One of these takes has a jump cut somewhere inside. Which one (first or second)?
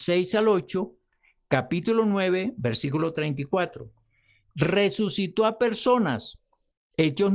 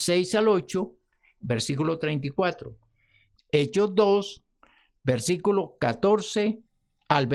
second